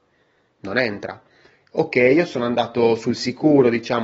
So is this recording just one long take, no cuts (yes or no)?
yes